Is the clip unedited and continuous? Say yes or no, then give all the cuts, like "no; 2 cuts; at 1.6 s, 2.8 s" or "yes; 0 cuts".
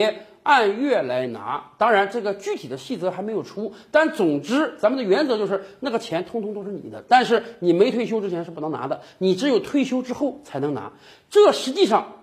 yes; 0 cuts